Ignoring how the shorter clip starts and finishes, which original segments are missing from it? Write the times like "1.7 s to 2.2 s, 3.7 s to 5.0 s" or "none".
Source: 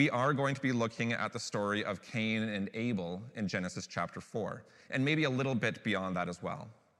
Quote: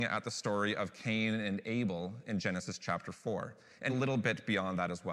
5.0 s to 5.3 s